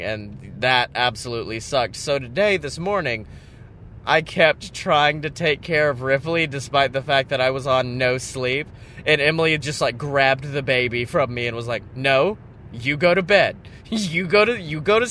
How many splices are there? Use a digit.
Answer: 0